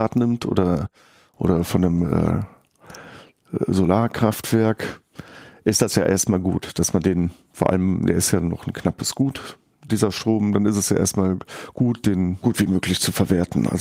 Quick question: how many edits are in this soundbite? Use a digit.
2